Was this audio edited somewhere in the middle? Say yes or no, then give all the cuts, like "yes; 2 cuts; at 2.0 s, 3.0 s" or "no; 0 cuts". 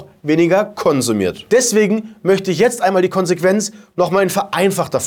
yes; 1 cut; at 1.5 s